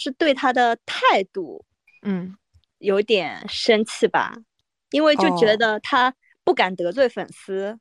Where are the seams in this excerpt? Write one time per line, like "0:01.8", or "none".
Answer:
none